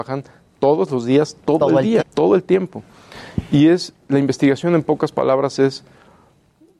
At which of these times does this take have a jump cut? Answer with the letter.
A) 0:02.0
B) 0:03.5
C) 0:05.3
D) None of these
A